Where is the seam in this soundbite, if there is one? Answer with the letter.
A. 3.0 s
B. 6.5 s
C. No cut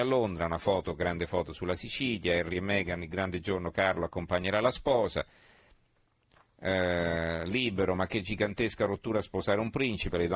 C